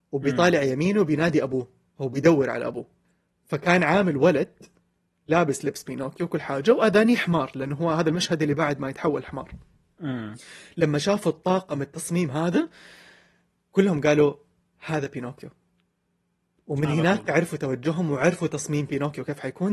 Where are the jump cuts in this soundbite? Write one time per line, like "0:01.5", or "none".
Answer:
none